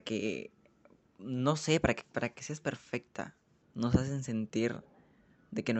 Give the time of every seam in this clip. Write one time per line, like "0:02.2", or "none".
0:03.6